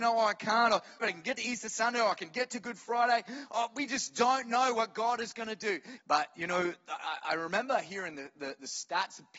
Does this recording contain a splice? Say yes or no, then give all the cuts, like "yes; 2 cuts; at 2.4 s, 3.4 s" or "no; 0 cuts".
yes; 2 cuts; at 1.0 s, 6.0 s